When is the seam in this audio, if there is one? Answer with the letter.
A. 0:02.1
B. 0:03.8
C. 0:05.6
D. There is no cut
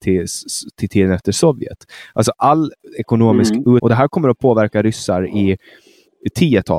B